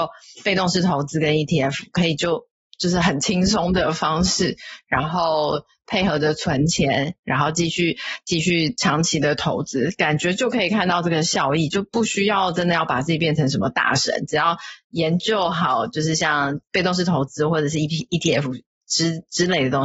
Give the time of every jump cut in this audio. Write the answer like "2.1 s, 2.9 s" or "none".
none

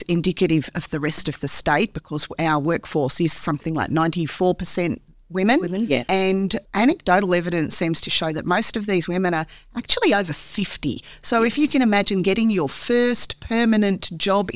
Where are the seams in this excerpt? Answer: 6.6 s

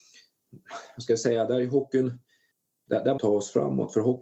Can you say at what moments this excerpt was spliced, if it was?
3.2 s

